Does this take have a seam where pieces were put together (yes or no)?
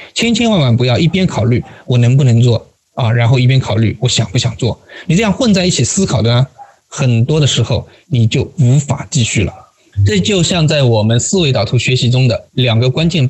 no